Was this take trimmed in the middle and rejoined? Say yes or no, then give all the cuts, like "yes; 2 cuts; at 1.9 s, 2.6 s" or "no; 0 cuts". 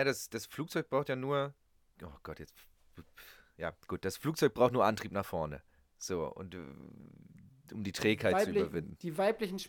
no; 0 cuts